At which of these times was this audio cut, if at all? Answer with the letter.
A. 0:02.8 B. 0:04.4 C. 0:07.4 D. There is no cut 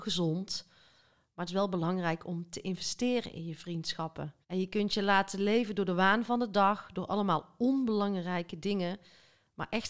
B